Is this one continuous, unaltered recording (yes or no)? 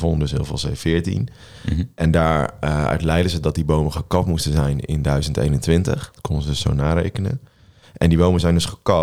yes